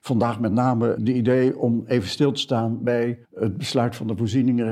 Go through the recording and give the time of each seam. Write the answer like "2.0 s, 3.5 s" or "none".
1.0 s, 3.2 s